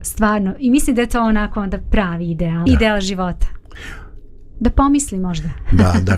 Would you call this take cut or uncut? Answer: cut